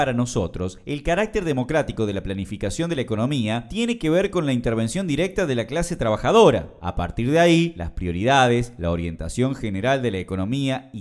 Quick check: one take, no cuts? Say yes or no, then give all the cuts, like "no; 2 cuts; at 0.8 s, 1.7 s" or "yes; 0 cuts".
yes; 0 cuts